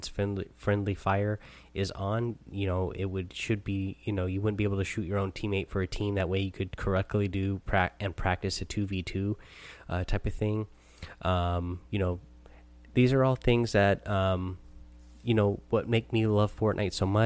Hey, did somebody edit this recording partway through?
yes; 1 cut; at 11.9 s

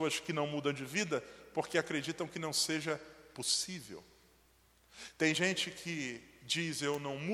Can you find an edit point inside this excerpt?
no; 0 cuts

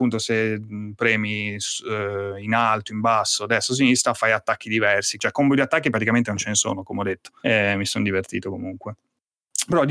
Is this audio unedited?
no; 2 cuts; at 5.2 s, 7.4 s

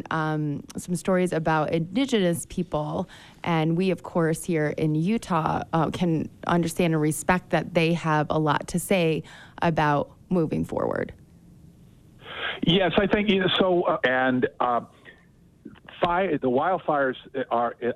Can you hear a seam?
yes; 2 cuts; at 14.0 s, 16.4 s

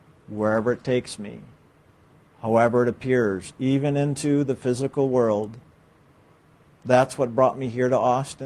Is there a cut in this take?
no; 0 cuts

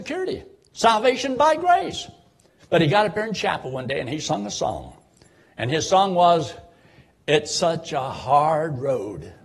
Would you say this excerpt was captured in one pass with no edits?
no; 1 cut; at 2.6 s

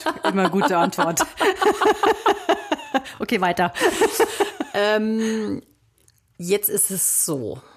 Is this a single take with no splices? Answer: yes; 0 cuts

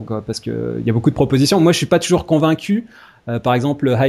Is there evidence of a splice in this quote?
no; 0 cuts

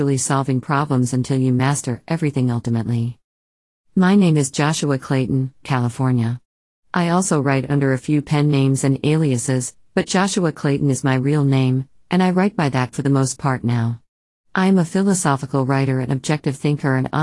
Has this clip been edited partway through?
yes; 1 cut; at 5.6 s

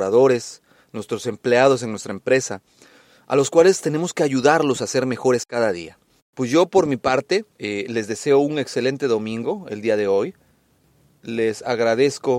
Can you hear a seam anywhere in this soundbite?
yes; 2 cuts; at 6.2 s, 7.5 s

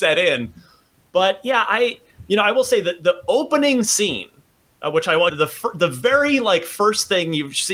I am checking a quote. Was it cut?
yes; 1 cut; at 5.3 s

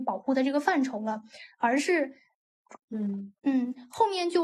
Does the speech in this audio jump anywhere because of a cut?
yes; 1 cut; at 2.8 s

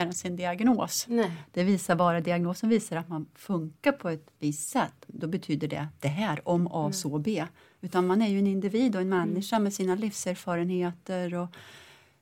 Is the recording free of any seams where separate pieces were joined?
no; 2 cuts; at 1.0 s, 5.1 s

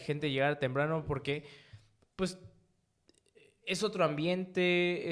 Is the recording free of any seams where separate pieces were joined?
yes; 0 cuts

